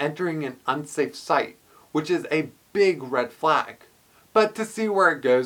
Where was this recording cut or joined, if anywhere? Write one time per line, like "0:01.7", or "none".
none